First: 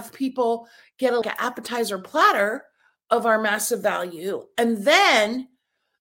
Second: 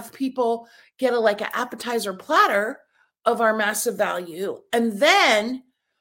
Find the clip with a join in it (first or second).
first